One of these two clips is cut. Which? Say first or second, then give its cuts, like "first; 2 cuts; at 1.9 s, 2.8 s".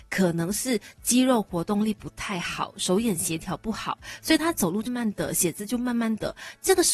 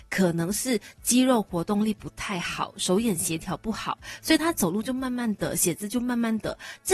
first; 1 cut; at 4.9 s